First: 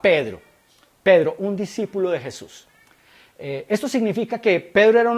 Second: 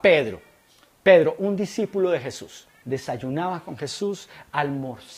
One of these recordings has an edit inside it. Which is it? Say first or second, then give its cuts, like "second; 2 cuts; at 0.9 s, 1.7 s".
second; 1 cut; at 2.8 s